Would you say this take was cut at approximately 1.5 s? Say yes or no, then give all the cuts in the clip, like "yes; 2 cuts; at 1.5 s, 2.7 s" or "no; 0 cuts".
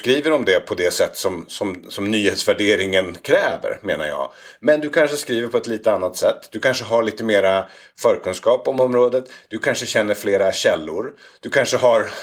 no; 0 cuts